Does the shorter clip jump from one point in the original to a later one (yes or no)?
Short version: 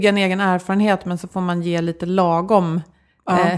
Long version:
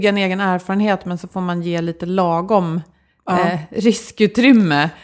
no